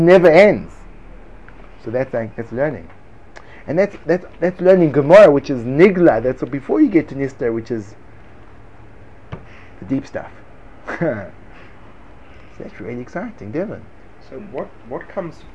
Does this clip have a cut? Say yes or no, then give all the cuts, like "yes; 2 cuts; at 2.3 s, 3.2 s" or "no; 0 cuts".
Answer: no; 0 cuts